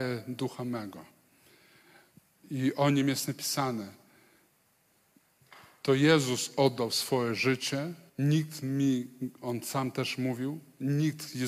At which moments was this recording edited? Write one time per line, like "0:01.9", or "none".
0:08.1